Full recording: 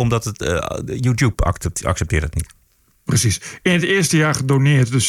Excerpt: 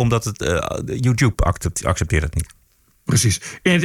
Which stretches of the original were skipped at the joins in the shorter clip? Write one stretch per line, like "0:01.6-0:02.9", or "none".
none

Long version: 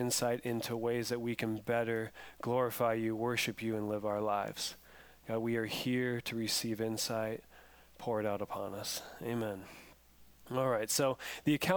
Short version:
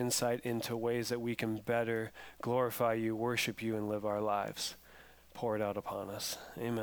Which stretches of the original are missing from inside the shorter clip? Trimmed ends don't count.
0:05.2-0:07.8

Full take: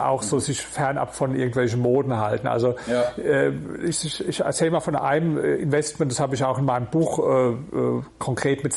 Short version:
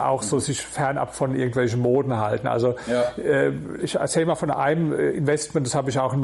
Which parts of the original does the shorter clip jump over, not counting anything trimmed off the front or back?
0:03.8-0:04.2

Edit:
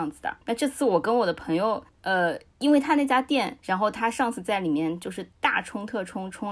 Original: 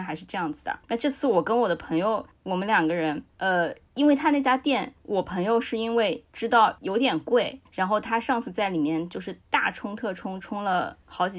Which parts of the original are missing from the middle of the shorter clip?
0:02.4-0:03.3
0:04.9-0:07.7

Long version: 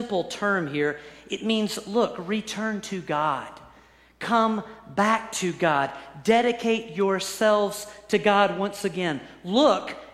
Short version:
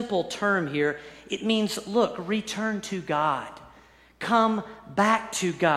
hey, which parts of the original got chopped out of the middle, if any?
none

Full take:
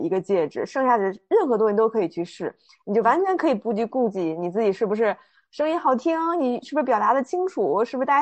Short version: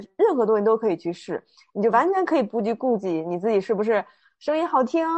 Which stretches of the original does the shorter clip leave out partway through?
none

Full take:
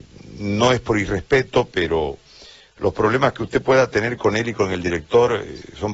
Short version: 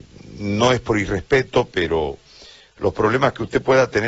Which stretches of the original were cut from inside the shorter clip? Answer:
none

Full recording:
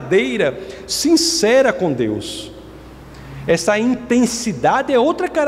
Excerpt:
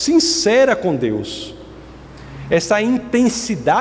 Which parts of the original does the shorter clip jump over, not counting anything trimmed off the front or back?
none

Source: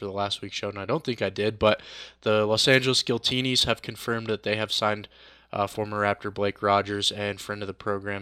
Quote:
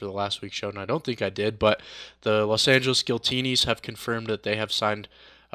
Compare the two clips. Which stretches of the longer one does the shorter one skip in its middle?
none

